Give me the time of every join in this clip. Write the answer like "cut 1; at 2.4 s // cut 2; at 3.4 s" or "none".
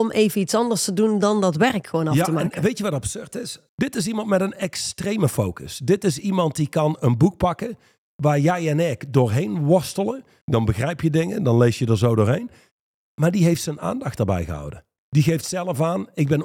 cut 1; at 3.7 s // cut 2; at 10.4 s // cut 3; at 15.0 s